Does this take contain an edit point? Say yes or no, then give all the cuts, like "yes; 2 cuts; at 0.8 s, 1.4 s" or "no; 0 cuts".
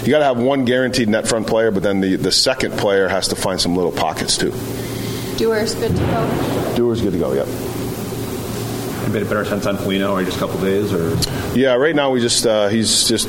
no; 0 cuts